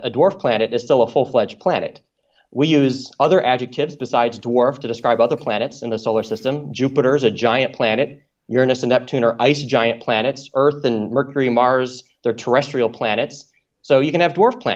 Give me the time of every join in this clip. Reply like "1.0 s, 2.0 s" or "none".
none